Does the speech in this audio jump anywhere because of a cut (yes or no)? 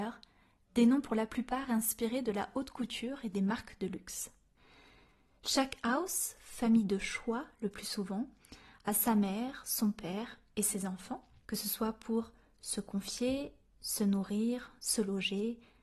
yes